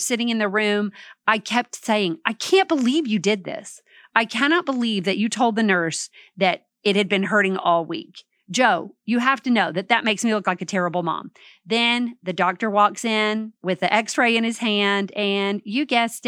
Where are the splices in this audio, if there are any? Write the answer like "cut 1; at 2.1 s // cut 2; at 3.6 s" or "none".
cut 1; at 13.6 s